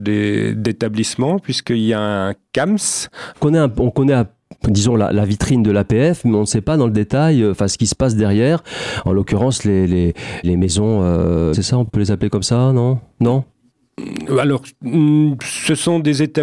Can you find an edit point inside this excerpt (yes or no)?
yes